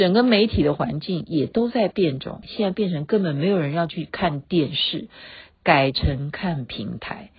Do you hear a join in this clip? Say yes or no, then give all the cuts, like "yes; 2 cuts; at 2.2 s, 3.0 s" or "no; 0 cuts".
yes; 1 cut; at 2.4 s